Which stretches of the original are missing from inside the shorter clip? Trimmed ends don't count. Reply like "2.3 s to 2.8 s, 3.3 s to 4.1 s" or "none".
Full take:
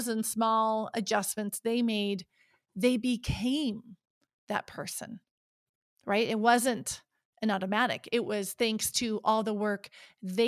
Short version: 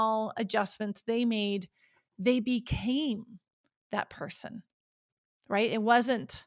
none